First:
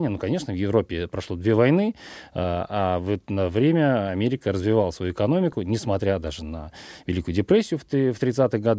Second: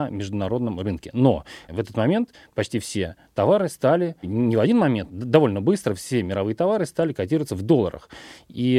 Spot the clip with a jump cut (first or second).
second